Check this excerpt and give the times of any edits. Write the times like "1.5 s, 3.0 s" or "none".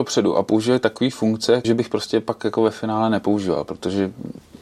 1.6 s